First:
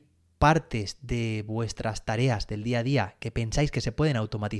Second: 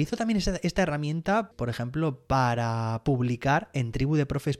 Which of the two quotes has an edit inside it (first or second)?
second